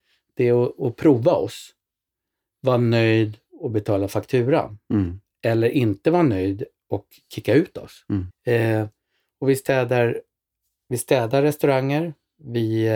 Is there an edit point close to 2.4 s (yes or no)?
no